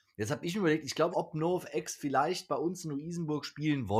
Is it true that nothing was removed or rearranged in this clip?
no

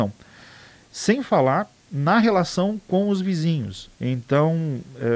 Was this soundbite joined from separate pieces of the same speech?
yes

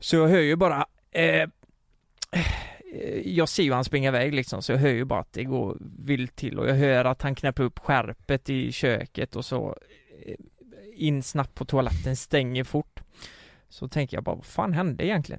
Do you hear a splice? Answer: no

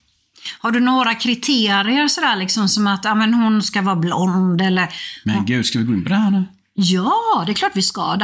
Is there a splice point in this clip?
no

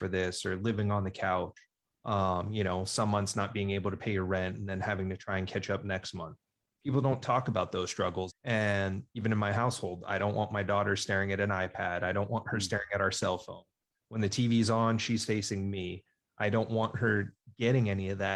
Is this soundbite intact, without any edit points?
no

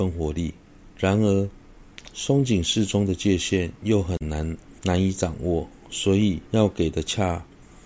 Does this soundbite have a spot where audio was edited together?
yes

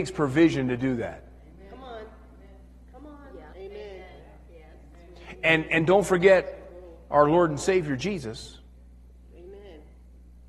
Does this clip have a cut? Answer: yes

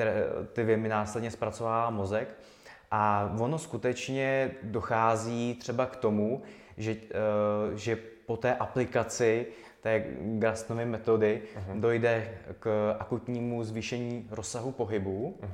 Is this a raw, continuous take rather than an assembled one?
yes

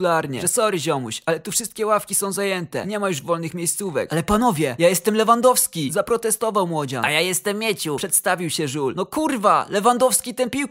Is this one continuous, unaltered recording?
yes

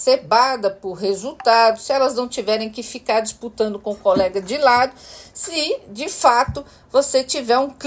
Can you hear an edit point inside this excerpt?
no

